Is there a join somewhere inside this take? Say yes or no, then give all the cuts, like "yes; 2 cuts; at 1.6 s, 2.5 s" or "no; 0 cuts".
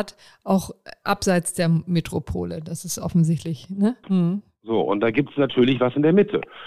yes; 1 cut; at 4.0 s